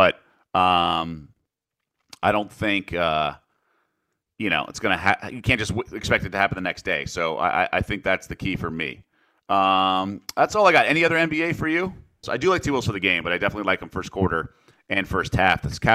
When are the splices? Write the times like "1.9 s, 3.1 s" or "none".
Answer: 12.2 s